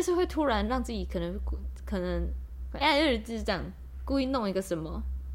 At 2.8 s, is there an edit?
yes; 1 cut; at 2.8 s

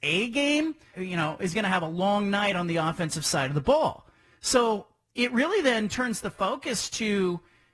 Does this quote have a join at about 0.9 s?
yes; 1 cut; at 0.9 s

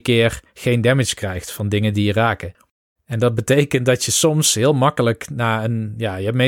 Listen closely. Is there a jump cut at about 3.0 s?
yes; 1 cut; at 3.0 s

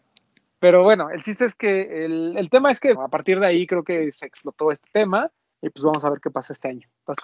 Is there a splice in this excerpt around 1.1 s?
no; 2 cuts; at 3.0 s, 5.5 s

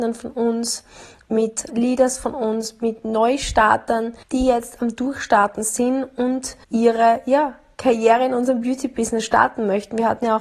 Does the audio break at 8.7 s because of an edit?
no; 3 cuts; at 1.7 s, 4.2 s, 6.6 s

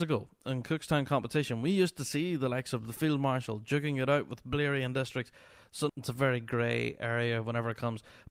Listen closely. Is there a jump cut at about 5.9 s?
yes; 1 cut; at 5.9 s

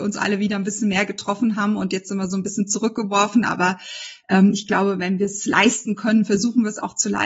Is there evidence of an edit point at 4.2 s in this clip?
no; 0 cuts

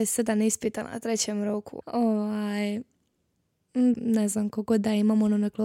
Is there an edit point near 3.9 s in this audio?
yes; 2 cuts; at 1.8 s, 3.9 s

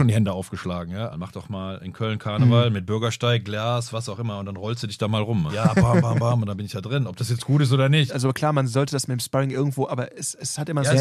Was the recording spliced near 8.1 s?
yes; 3 cuts; at 1.1 s, 5.5 s, 8.1 s

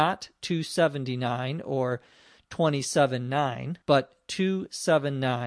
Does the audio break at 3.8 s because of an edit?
yes; 1 cut; at 3.8 s

